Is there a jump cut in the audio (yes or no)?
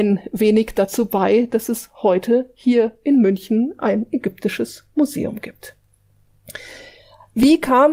no